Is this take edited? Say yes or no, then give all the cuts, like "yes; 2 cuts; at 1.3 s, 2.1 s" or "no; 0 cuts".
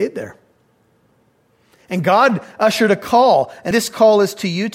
yes; 1 cut; at 3.7 s